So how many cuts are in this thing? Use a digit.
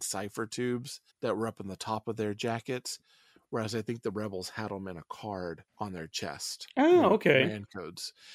2